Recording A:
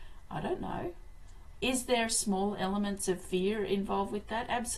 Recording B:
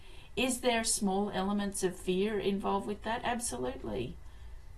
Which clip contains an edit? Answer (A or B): A